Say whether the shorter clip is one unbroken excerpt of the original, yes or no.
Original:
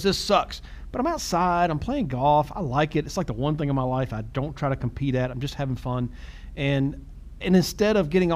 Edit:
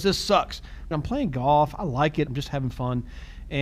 no